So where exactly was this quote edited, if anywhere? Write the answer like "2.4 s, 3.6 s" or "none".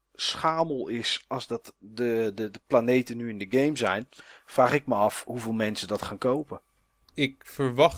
none